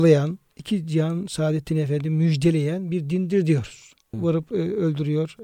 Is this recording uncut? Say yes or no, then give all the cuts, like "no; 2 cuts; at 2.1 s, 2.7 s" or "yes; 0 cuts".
no; 1 cut; at 4.1 s